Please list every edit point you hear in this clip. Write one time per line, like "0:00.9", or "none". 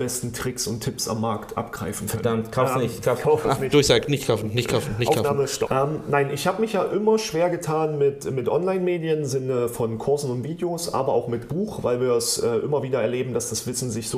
0:03.4
0:05.7